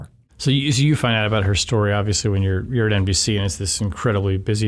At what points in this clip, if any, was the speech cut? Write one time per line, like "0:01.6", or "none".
0:02.7